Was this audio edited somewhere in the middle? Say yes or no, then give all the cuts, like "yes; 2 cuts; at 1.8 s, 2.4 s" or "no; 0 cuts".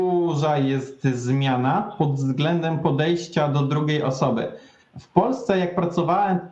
no; 0 cuts